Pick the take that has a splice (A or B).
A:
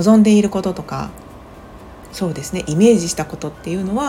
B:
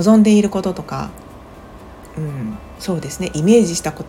A